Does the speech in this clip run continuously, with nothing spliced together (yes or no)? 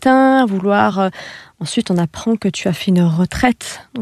yes